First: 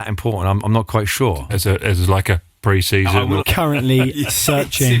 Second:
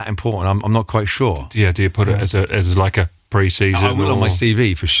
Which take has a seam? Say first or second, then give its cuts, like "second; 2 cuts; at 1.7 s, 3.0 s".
first; 2 cuts; at 1.5 s, 3.4 s